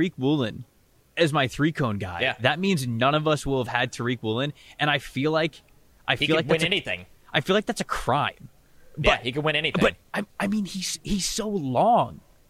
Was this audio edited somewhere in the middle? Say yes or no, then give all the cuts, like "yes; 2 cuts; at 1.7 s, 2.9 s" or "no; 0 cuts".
no; 0 cuts